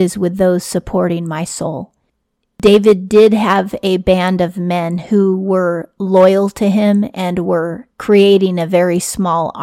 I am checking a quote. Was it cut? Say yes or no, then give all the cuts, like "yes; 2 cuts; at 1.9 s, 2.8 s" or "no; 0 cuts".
no; 0 cuts